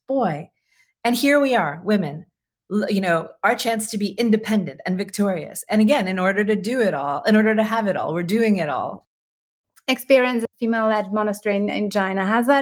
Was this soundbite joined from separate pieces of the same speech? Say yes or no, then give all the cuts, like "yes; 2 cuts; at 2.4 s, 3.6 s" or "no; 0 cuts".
no; 0 cuts